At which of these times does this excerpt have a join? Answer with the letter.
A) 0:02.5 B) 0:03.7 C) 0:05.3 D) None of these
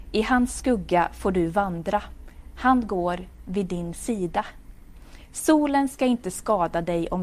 D